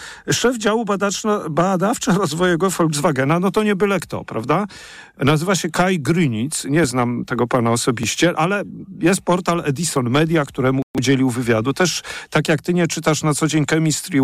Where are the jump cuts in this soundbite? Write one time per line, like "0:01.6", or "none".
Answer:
none